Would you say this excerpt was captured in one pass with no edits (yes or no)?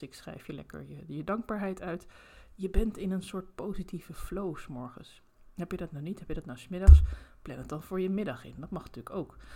yes